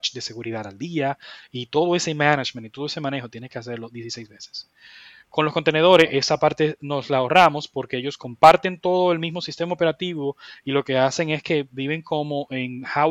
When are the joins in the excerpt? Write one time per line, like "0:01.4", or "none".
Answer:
none

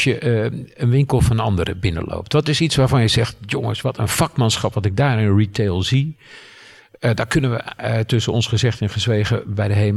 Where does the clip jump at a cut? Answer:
none

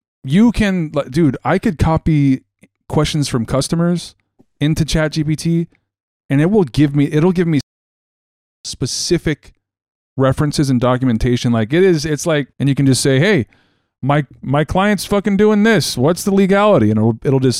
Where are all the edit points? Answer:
0:12.5

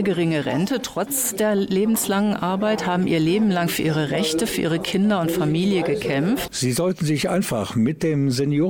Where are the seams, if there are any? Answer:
0:06.5

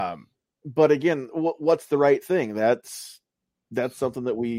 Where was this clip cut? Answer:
none

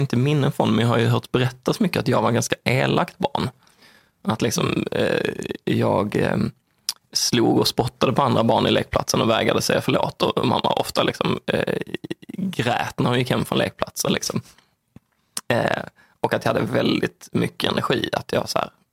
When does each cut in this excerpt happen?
0:14.1

